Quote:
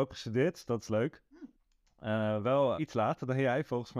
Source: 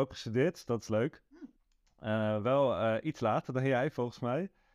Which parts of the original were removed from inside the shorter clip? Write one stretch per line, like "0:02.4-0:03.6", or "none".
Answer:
0:02.8-0:03.0